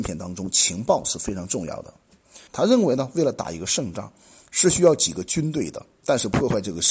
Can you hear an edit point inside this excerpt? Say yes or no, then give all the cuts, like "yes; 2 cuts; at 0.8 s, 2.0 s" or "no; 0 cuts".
yes; 1 cut; at 2.5 s